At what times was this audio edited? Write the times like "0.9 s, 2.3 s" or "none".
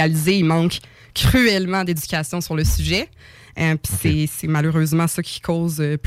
none